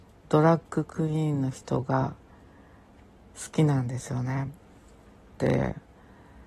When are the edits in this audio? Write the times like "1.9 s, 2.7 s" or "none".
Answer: 5.4 s